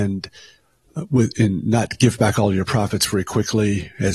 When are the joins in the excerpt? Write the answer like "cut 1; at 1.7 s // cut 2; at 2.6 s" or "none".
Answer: none